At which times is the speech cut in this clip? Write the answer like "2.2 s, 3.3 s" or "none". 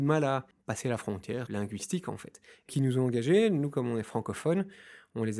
2.7 s